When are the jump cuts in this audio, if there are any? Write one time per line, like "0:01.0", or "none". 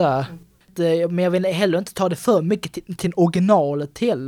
none